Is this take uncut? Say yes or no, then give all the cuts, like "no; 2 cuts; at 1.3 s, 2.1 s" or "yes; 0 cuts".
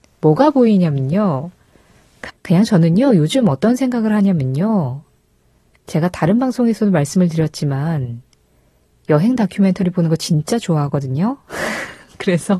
no; 1 cut; at 2.3 s